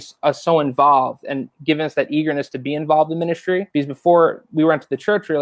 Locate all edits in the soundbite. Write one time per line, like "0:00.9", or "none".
0:03.7